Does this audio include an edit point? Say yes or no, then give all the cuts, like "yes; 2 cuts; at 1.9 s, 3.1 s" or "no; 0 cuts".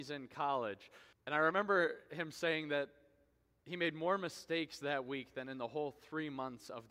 yes; 1 cut; at 1.1 s